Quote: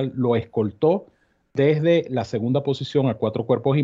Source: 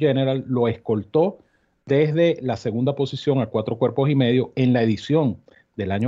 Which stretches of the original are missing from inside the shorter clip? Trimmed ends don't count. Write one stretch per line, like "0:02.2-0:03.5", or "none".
none